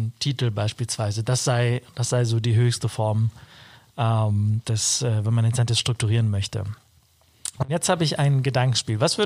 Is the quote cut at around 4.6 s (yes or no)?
yes